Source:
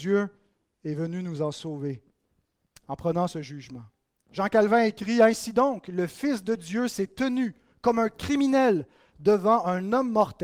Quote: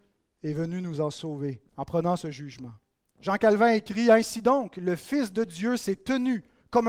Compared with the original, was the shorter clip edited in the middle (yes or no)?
yes